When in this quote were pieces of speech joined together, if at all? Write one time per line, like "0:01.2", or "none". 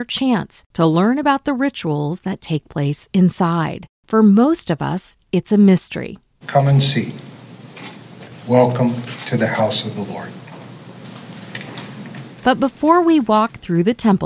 0:06.4